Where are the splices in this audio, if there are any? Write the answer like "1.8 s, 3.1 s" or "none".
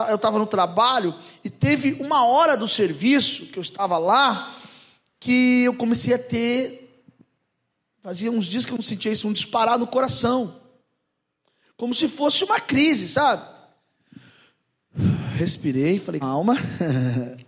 16.2 s